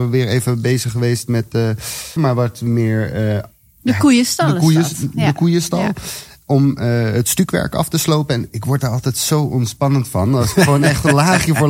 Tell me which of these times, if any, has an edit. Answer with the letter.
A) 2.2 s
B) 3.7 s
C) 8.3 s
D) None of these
A